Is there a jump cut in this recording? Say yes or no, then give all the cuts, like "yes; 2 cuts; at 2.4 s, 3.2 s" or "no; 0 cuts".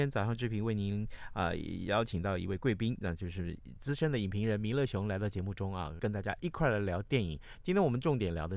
yes; 1 cut; at 6.0 s